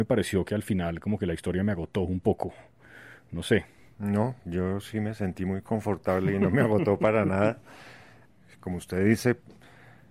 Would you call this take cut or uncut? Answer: uncut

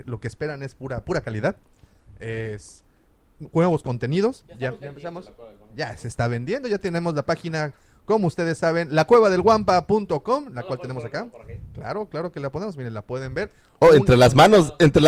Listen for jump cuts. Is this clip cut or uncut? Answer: uncut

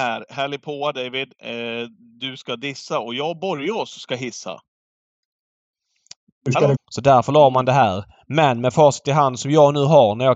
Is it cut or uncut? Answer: cut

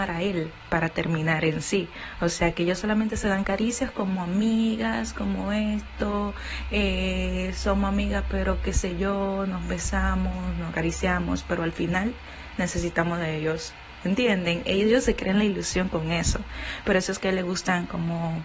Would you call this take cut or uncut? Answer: uncut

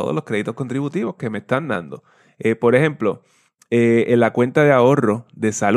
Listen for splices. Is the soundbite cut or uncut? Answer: uncut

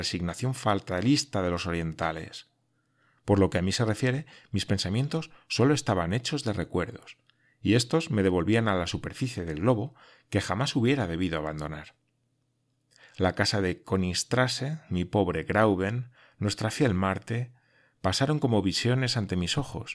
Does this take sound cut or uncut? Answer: uncut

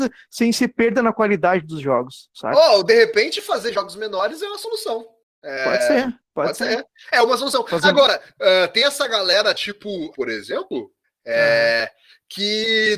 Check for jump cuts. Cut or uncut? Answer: cut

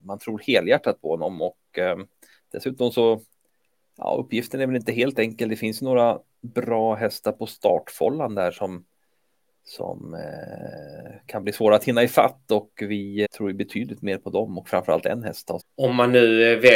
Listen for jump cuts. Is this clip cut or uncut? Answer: cut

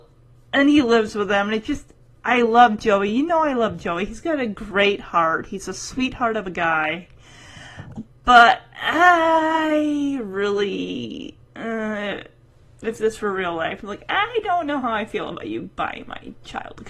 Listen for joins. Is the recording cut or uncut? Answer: uncut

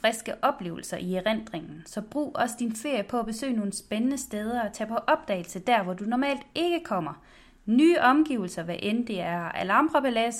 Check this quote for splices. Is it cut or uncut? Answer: uncut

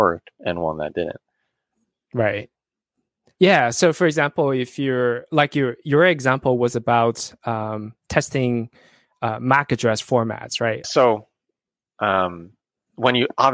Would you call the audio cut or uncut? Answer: cut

